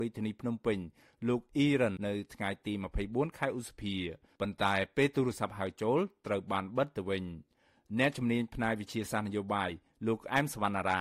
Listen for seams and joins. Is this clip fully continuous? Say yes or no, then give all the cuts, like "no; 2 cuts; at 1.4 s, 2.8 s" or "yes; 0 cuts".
no; 1 cut; at 2.0 s